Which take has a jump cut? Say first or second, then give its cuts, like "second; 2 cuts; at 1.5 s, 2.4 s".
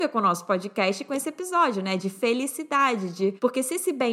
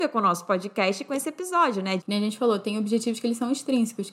second; 1 cut; at 2.0 s